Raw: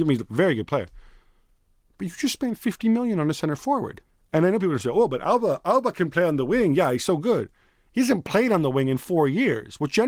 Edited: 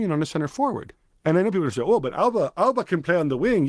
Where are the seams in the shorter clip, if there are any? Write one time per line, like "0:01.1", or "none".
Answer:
none